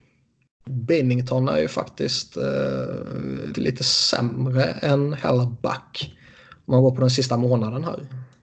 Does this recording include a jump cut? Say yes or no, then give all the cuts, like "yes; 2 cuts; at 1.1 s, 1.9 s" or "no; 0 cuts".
yes; 1 cut; at 3.5 s